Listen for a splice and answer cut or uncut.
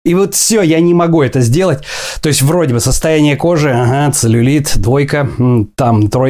uncut